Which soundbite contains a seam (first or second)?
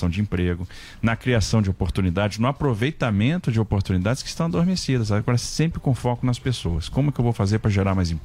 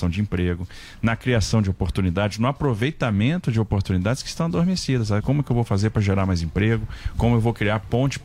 second